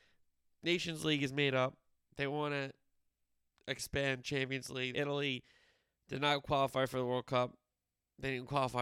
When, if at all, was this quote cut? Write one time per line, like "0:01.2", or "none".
0:01.9
0:04.9